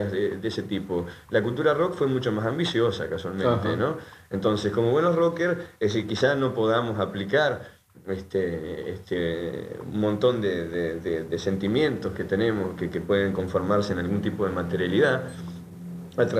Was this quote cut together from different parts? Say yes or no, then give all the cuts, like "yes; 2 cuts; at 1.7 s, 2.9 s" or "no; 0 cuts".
no; 0 cuts